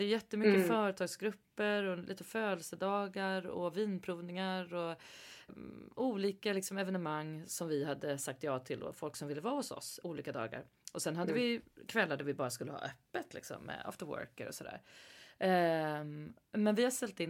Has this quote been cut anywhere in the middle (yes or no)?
yes